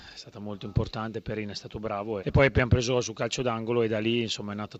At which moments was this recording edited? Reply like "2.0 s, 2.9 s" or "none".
2.2 s